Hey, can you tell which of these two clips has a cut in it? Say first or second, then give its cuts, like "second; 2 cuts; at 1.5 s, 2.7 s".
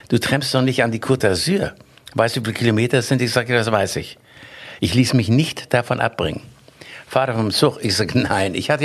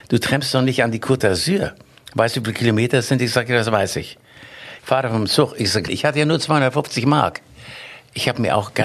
second; 2 cuts; at 4.8 s, 5.9 s